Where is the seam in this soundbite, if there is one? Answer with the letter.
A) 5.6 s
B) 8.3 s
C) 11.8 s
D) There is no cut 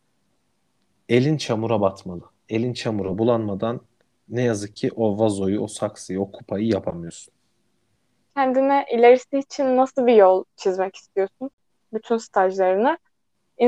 B